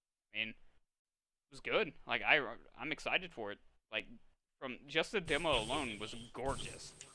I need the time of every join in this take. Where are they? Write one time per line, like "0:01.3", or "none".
none